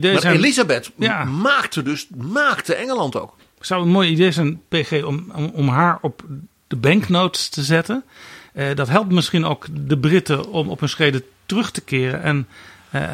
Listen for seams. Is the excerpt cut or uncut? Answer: uncut